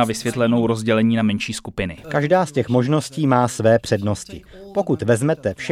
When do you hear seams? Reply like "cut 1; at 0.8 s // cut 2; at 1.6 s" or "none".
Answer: cut 1; at 2.0 s

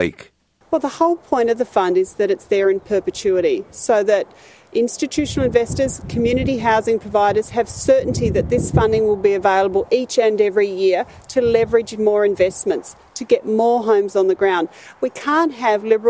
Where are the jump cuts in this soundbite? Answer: none

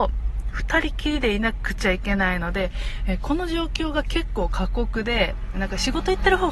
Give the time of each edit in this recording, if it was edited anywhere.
cut 1; at 5.5 s

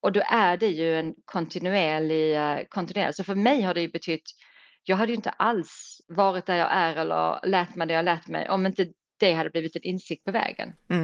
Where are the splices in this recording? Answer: cut 1; at 6.0 s

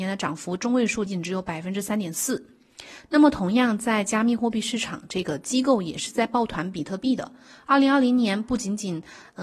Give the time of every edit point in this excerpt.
cut 1; at 1.1 s

